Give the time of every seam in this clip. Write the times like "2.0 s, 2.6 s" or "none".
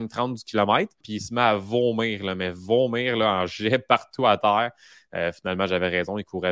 1.0 s

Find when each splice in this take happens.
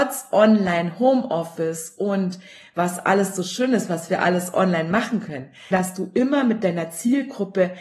5.7 s

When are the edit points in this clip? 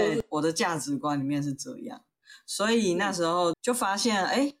3.5 s

